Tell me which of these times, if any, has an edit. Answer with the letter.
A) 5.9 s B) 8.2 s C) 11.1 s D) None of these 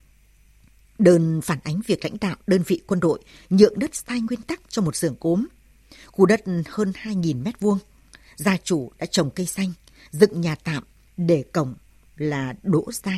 C